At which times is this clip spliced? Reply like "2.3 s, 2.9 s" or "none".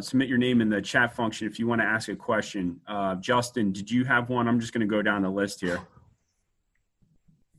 none